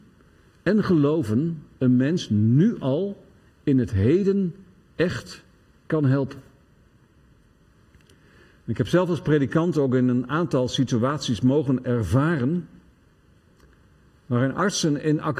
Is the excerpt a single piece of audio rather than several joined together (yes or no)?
yes